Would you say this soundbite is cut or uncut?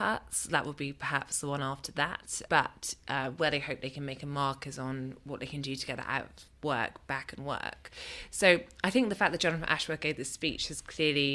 uncut